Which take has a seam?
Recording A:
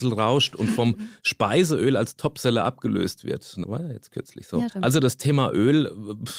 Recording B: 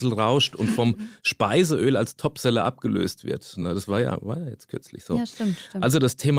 A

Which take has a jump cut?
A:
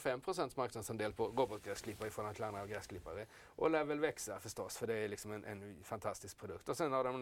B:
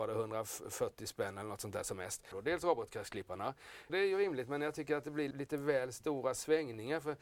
B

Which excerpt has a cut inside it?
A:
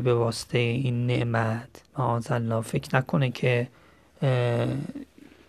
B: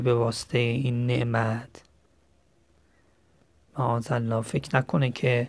A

